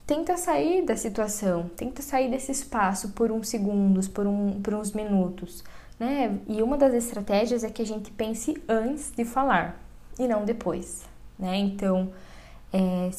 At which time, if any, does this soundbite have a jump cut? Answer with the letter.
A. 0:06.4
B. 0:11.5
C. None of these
A